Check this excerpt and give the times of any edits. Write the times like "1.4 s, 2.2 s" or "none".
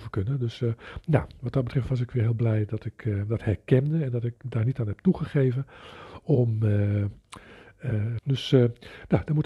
8.2 s